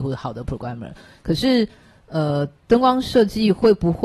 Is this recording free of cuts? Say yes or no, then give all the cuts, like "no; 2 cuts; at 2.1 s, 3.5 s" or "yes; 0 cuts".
yes; 0 cuts